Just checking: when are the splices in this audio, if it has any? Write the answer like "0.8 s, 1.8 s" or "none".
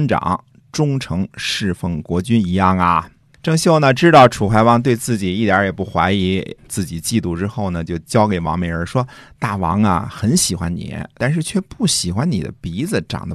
6.6 s, 8.9 s, 11.2 s